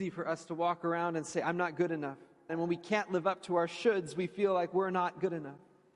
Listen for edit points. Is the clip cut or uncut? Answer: cut